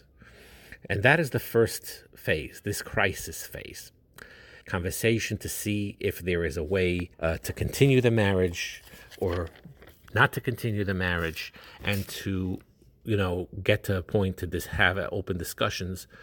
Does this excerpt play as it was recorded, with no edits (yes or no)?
no